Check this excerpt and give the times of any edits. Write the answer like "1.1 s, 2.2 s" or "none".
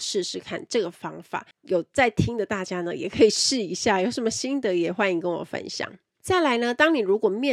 1.5 s